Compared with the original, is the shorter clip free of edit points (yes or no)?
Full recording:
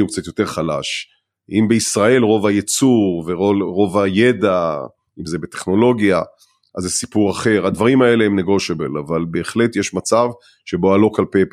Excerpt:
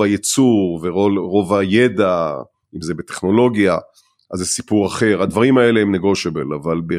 yes